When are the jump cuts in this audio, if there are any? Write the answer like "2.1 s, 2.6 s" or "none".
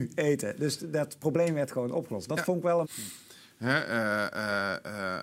2.8 s